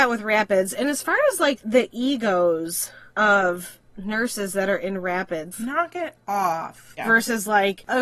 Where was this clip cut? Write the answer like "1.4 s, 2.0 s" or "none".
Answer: 5.5 s, 7.0 s